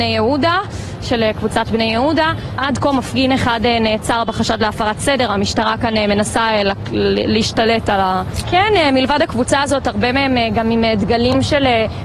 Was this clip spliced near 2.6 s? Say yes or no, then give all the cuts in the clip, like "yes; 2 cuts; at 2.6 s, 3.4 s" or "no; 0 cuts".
yes; 2 cuts; at 2.6 s, 8.4 s